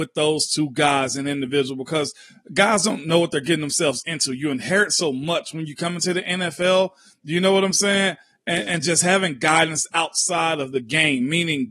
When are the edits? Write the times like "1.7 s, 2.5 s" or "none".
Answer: none